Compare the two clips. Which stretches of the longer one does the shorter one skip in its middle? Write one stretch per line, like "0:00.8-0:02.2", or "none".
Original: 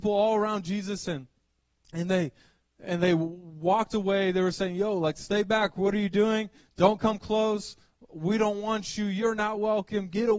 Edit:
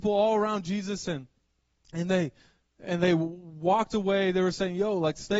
none